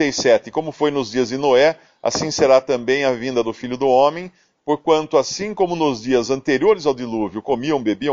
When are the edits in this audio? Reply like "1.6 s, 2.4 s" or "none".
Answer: none